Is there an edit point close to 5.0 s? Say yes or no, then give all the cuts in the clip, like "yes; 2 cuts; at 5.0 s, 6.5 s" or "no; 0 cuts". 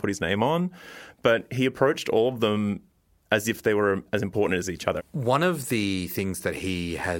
yes; 1 cut; at 5.0 s